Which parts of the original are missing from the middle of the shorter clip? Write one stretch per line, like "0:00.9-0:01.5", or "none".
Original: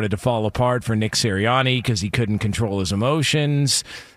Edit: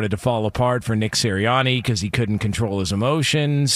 none